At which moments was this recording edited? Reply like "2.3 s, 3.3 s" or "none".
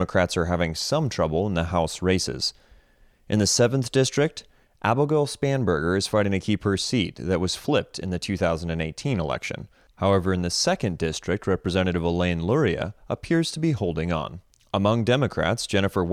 none